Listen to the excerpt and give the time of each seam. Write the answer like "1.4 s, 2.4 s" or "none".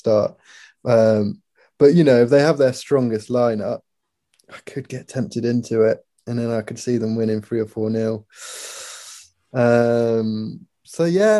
none